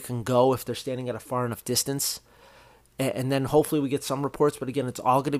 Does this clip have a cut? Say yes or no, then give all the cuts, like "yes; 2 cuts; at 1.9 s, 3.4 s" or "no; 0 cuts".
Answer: no; 0 cuts